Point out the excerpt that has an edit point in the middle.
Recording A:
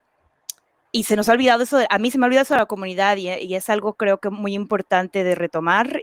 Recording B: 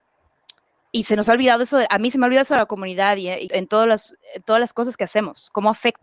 B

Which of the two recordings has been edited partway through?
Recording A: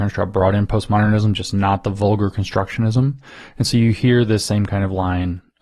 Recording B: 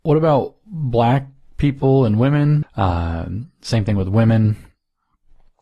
B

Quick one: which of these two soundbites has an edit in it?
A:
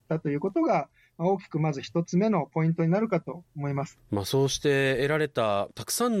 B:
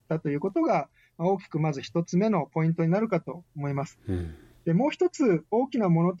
A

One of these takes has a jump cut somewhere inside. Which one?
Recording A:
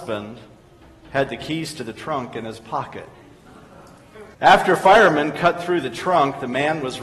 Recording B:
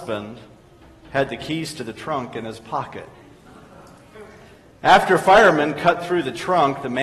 A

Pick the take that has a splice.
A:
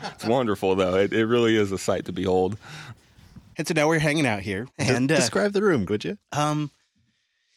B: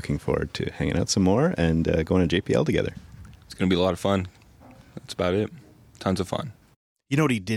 A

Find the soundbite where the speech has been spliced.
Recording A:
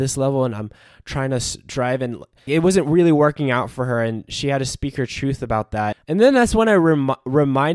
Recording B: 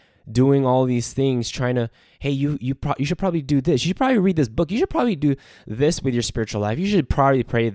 A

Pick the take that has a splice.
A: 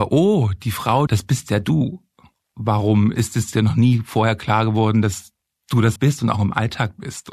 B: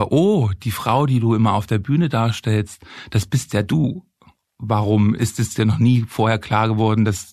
A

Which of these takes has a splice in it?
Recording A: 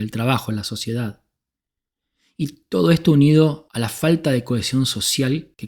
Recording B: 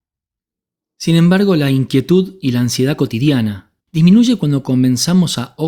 B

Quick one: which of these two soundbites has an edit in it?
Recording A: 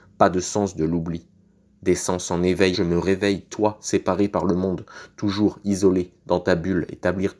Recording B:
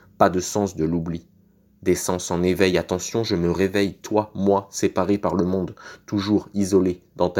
A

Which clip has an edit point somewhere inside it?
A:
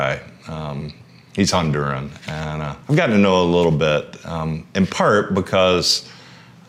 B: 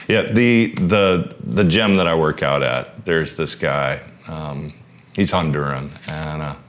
A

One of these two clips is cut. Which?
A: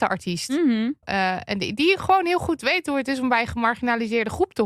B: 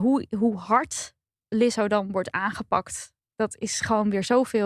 A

